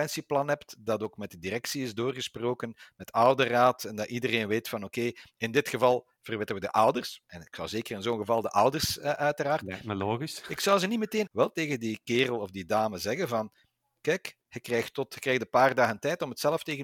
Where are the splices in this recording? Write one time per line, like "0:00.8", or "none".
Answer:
0:11.3